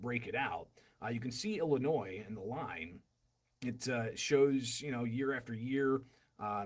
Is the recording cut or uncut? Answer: uncut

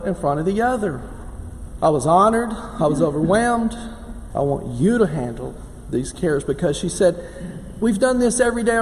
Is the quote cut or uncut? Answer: cut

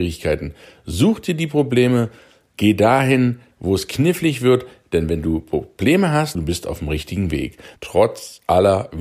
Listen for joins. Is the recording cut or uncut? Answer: cut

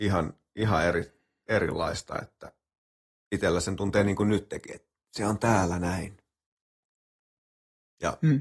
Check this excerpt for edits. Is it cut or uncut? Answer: uncut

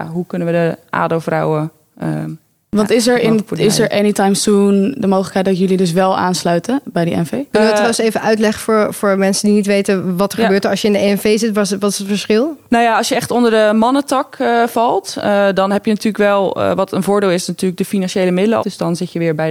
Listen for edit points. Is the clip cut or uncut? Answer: cut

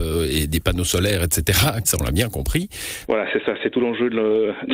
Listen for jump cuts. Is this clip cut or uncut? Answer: cut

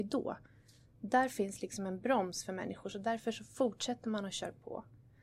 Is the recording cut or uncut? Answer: uncut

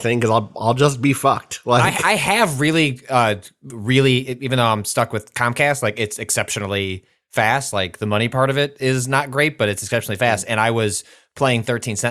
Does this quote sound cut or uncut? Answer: uncut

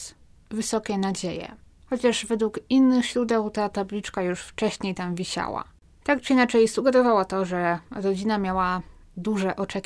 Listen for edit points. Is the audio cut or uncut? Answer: uncut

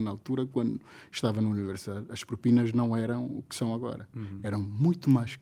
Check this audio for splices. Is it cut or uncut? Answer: uncut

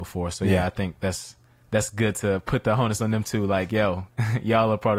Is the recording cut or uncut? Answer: uncut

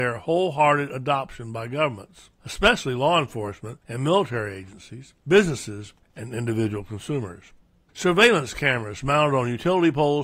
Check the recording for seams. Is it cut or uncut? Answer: uncut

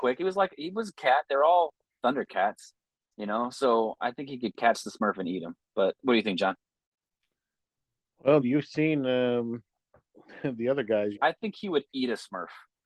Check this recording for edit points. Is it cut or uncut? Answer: cut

